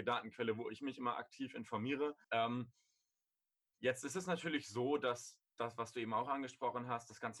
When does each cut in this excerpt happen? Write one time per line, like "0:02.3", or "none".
0:02.2